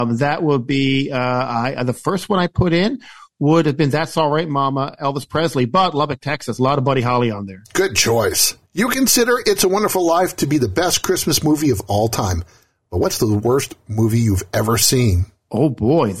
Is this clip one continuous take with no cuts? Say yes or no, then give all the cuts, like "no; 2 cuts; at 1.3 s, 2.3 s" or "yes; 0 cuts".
no; 1 cut; at 8.6 s